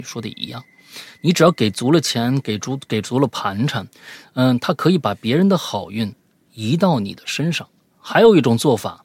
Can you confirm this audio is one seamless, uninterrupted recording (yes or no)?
yes